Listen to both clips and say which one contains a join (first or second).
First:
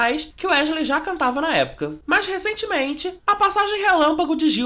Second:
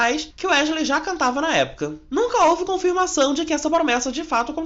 first